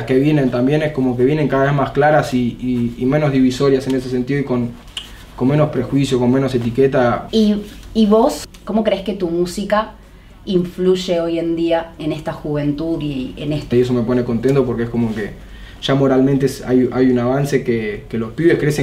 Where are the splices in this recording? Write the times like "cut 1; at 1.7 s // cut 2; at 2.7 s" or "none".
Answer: cut 1; at 7.3 s // cut 2; at 12.0 s // cut 3; at 13.7 s